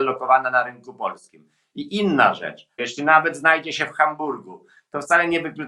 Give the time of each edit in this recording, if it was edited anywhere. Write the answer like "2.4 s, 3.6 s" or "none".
2.8 s

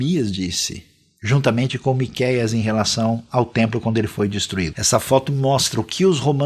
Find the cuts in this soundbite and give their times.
4.7 s

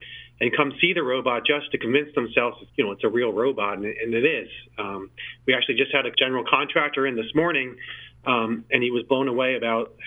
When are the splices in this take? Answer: none

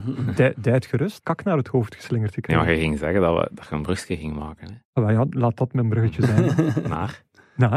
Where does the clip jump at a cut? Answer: 1.2 s

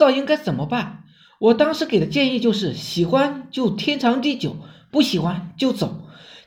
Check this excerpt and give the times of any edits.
none

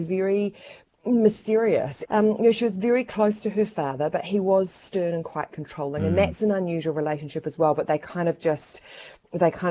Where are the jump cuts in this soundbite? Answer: 2.0 s

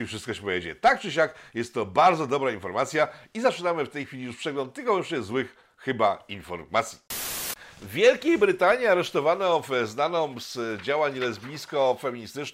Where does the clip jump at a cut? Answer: none

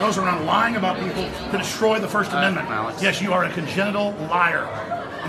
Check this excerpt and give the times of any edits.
2.7 s

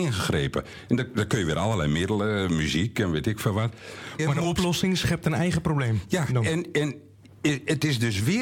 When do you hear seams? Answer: 4.2 s

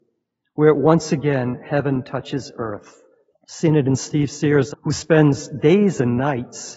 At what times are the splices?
3.3 s, 4.7 s

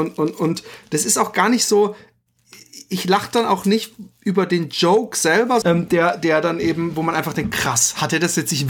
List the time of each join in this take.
5.6 s

